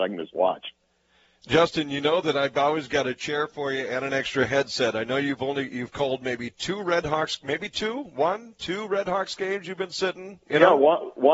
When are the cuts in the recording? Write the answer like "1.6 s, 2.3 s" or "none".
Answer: none